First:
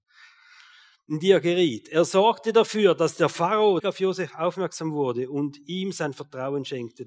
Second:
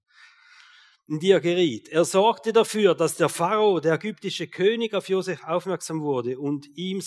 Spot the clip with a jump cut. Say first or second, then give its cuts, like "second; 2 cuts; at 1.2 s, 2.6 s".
first; 1 cut; at 3.8 s